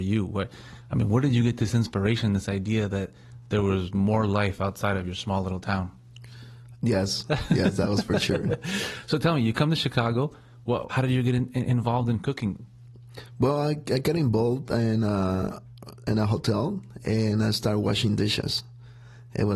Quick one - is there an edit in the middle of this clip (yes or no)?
yes